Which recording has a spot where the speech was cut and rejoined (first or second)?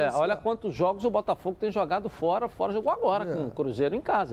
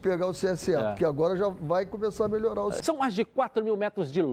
second